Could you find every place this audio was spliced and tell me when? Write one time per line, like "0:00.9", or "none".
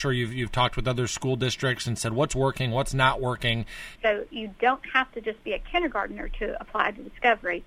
0:04.0

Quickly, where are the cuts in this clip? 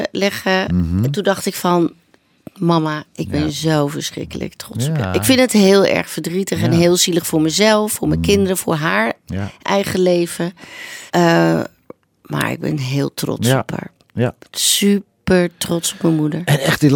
0:11.1

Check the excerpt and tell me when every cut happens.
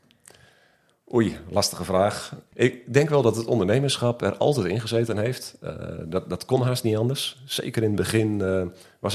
none

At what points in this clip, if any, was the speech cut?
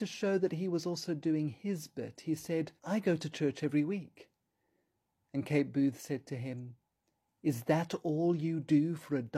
0:02.8

